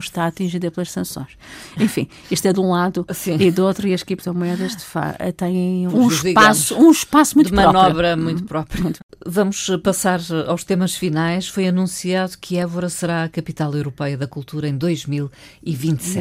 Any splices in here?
yes; 1 cut; at 5.9 s

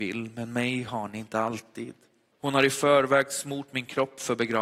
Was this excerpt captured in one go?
no; 1 cut; at 2.3 s

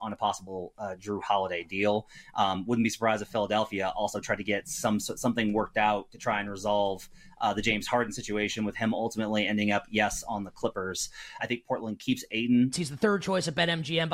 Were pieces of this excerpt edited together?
yes; 2 cuts; at 11.4 s, 12.7 s

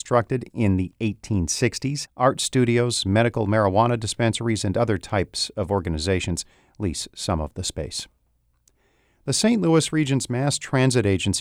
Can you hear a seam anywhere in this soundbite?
yes; 1 cut; at 2.0 s

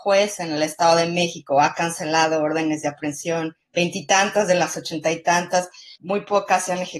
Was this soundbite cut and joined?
yes; 2 cuts; at 3.6 s, 6.0 s

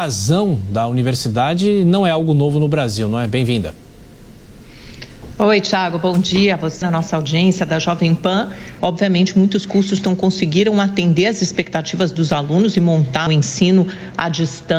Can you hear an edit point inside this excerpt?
yes; 3 cuts; at 6.8 s, 8.8 s, 13.3 s

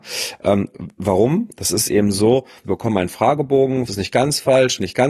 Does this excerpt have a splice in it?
yes; 2 cuts; at 2.6 s, 3.9 s

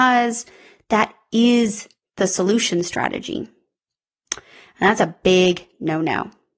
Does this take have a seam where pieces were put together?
no; 0 cuts

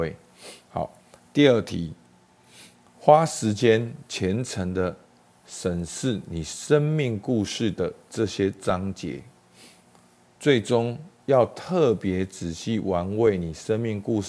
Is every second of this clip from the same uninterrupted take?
yes; 0 cuts

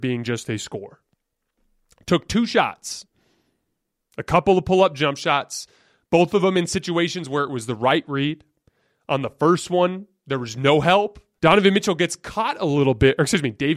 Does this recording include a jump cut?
yes; 1 cut; at 11.4 s

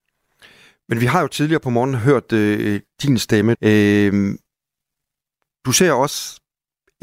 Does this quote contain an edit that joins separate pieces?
yes; 1 cut; at 3.5 s

